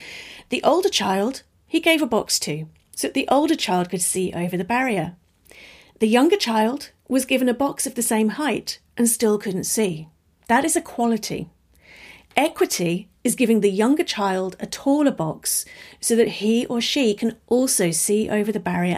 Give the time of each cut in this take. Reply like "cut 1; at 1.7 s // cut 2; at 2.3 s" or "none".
none